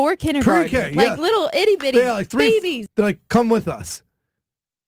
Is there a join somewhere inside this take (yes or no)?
yes